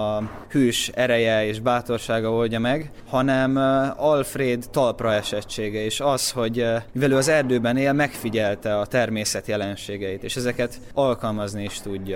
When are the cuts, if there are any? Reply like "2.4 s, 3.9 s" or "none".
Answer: none